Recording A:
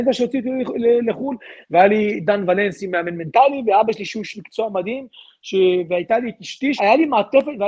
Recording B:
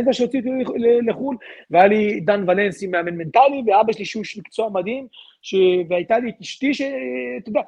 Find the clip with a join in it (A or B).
A